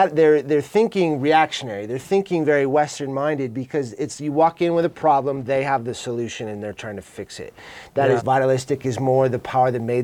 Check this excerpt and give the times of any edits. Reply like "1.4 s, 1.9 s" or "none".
8.2 s